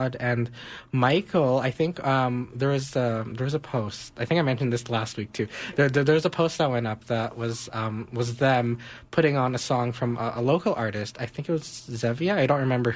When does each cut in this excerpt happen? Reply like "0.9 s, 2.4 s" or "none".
none